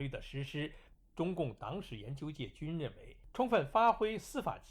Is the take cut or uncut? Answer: cut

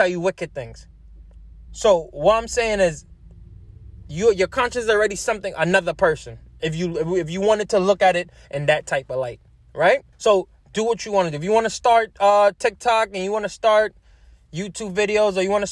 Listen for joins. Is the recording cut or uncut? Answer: cut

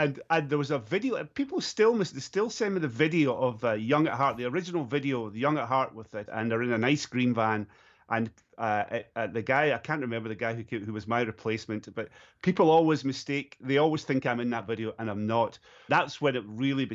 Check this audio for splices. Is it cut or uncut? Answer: cut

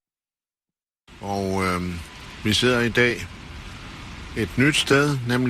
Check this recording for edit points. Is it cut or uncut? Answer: uncut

